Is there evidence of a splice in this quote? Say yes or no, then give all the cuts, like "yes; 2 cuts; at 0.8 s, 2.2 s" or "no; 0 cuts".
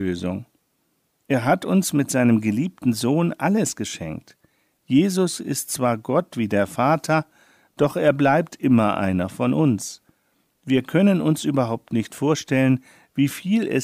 no; 0 cuts